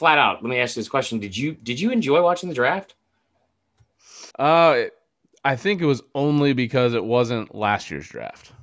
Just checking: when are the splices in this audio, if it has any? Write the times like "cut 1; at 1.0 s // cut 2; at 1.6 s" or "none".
cut 1; at 4.3 s